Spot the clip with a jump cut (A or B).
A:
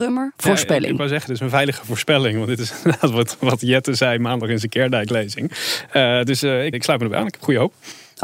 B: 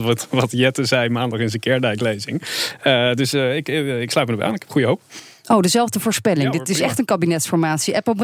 A